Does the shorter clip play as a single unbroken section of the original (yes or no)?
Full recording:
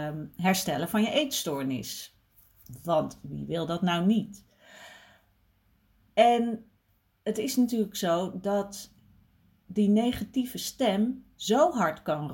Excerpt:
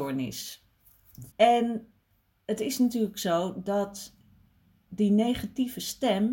no